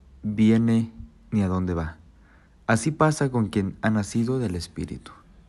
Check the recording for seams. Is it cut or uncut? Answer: uncut